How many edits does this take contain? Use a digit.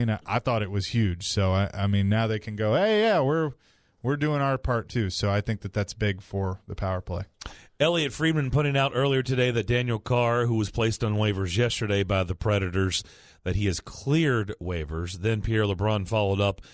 0